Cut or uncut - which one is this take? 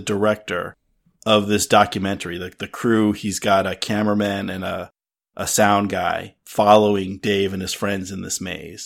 uncut